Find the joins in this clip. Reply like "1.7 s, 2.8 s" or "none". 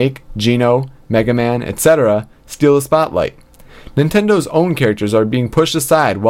none